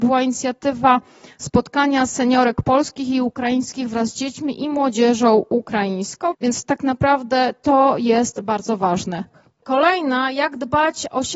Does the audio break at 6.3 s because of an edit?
yes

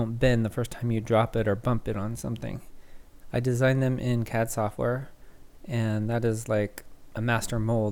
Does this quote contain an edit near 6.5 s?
no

